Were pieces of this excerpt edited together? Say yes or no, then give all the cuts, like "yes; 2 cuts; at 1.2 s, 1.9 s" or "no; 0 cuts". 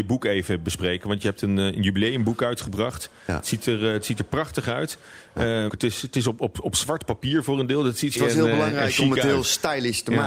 yes; 2 cuts; at 5.7 s, 8.2 s